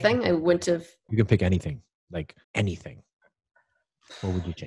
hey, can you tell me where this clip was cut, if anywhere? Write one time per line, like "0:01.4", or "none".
0:01.1
0:02.4